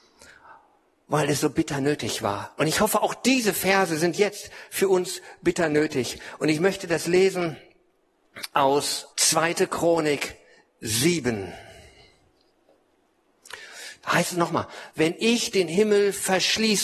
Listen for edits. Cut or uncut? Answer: cut